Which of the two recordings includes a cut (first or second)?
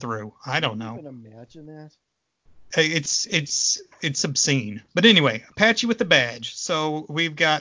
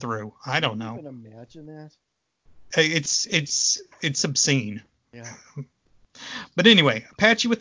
first